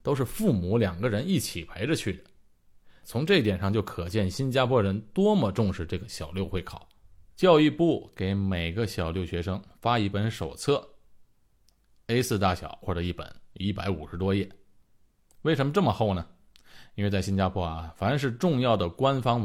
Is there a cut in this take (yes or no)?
yes